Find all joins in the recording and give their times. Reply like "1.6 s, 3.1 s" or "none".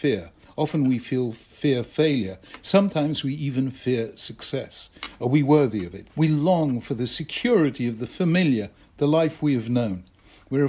6.1 s